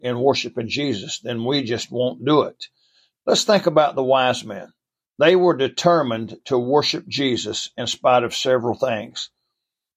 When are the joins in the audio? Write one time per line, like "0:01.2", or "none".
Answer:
0:03.2